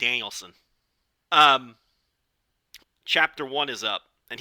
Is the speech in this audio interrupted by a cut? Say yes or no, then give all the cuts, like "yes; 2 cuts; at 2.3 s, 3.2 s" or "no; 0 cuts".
yes; 2 cuts; at 1.3 s, 2.8 s